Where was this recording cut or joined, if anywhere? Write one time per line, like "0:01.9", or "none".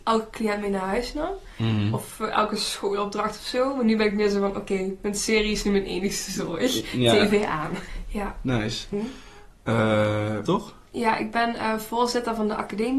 0:07.9
0:08.9
0:10.5